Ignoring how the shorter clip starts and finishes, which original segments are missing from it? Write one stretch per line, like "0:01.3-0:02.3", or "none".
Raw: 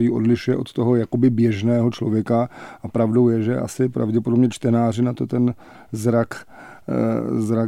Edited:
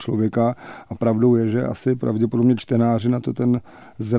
none